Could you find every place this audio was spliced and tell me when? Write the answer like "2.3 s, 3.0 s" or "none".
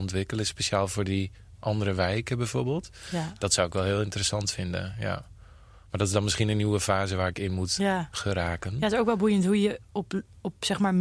none